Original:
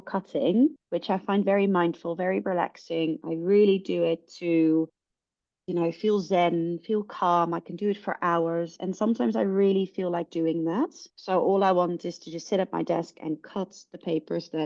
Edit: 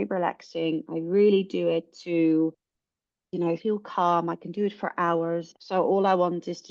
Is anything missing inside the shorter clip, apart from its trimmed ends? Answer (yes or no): yes